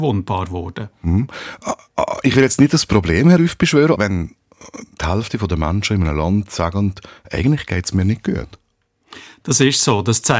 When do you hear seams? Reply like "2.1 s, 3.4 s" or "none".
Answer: 4.0 s